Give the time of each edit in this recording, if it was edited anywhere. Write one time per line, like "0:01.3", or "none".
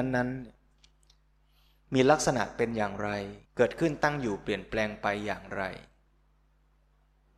0:03.4